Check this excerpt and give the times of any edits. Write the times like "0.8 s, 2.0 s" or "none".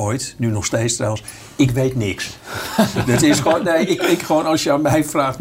none